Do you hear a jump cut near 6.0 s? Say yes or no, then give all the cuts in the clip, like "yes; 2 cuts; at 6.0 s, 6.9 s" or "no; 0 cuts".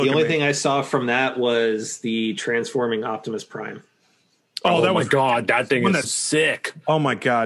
yes; 1 cut; at 6.0 s